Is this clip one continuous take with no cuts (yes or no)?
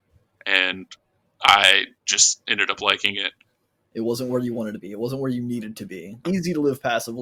no